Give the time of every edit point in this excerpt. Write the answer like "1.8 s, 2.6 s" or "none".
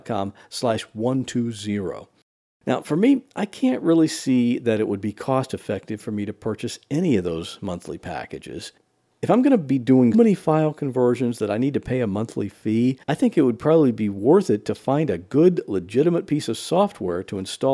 10.1 s, 13.0 s